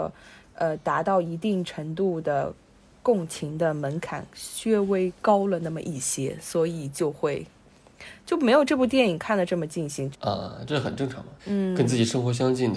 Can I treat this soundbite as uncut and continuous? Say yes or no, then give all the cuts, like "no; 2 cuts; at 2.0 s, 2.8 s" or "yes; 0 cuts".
no; 2 cuts; at 10.1 s, 11.4 s